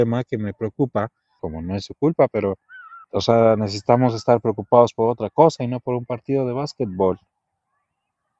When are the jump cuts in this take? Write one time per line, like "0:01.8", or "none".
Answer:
0:01.4
0:03.0